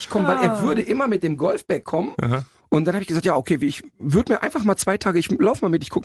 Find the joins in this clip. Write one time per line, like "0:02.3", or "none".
0:02.5

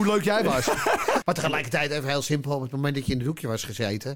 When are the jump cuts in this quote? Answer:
0:01.2

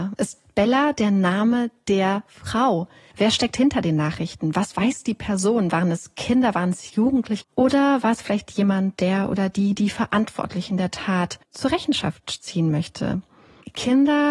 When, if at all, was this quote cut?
0:03.1
0:07.4
0:11.4

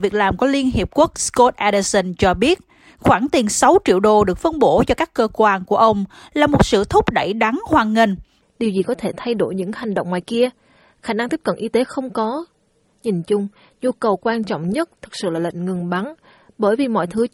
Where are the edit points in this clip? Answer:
0:08.4

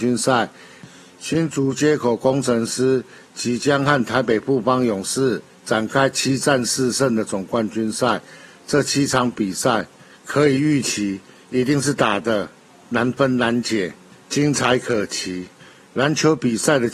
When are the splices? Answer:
none

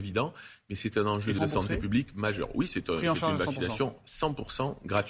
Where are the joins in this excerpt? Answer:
0:01.4

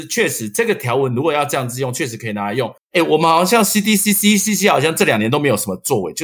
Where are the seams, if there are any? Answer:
0:02.8

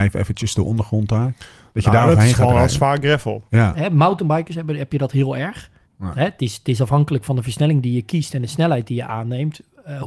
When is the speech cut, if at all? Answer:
0:03.7
0:05.8

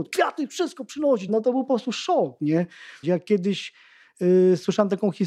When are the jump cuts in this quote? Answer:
0:01.3
0:03.0

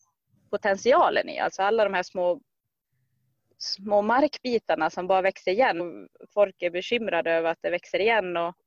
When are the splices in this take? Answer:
0:05.8

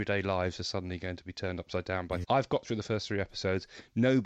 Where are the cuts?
0:02.2

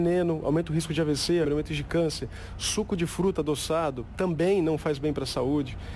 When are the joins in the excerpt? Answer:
0:01.4

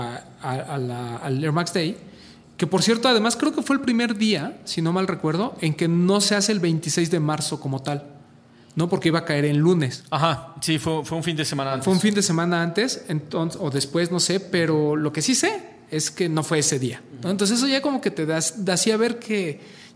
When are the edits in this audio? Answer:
none

